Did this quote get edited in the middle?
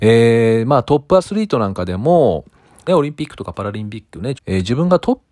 yes; 2 cuts; at 2.9 s, 4.4 s

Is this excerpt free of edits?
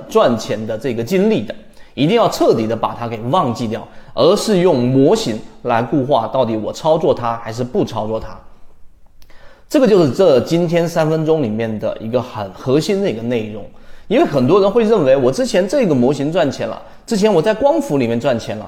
yes; 0 cuts

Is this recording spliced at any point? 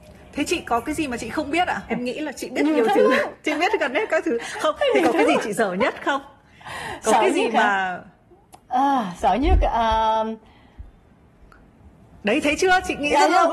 yes; 1 cut; at 1.9 s

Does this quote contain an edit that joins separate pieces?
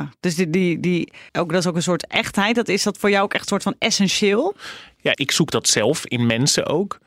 yes; 2 cuts; at 1.3 s, 5.1 s

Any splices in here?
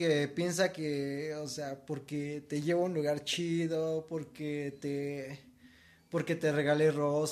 no; 0 cuts

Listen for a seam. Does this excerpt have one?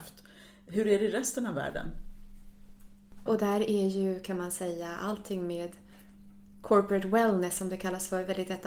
yes; 1 cut; at 3.3 s

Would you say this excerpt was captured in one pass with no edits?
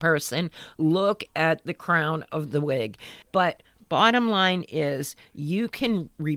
no; 1 cut; at 3.2 s

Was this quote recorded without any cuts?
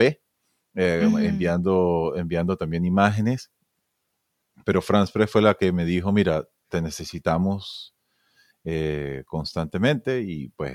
yes; 0 cuts

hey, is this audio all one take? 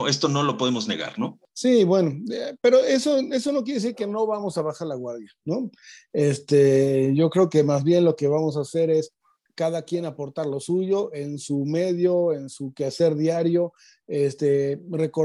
yes; 0 cuts

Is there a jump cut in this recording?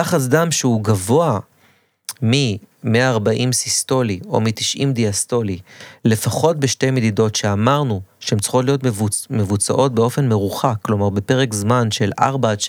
no; 0 cuts

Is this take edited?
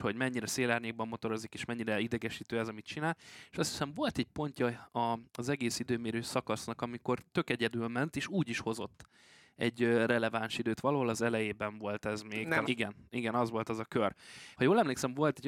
yes; 2 cuts; at 12.6 s, 14.5 s

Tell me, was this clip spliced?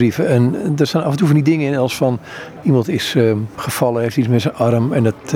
no; 0 cuts

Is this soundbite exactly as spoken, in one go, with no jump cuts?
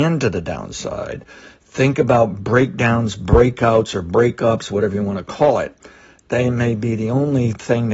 yes; 0 cuts

